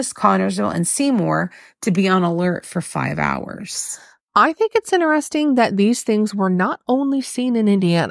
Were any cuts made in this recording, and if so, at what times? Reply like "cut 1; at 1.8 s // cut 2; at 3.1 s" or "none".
none